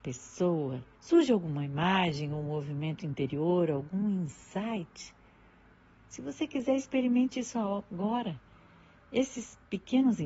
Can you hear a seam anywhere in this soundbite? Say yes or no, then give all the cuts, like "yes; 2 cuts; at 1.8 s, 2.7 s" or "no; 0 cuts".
yes; 1 cut; at 0.9 s